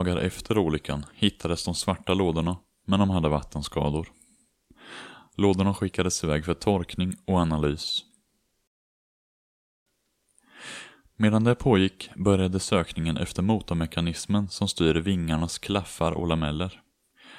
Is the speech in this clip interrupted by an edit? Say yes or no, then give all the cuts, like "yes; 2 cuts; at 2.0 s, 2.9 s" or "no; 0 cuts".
no; 0 cuts